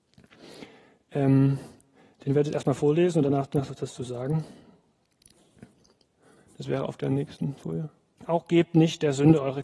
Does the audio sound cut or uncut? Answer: cut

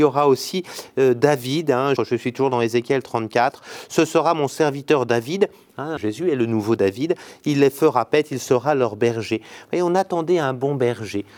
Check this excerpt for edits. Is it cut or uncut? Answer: cut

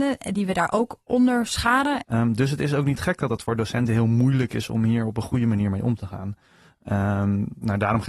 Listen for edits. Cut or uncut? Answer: cut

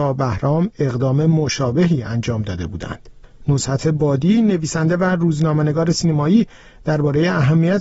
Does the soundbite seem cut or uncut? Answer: uncut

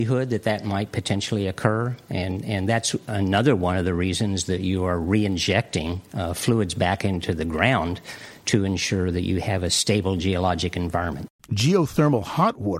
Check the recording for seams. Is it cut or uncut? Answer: cut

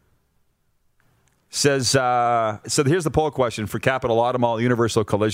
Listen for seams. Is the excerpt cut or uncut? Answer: cut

